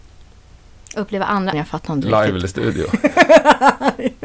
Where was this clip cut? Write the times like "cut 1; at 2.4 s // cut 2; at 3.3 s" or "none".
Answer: cut 1; at 1.5 s